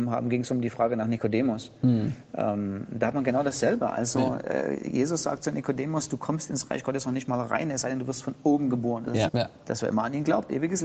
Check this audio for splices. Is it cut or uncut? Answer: cut